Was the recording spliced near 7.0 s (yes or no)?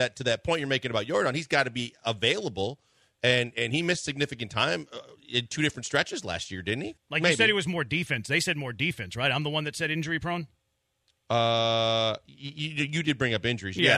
yes